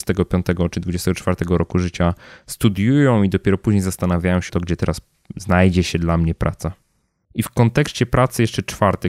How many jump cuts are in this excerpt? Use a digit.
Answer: 1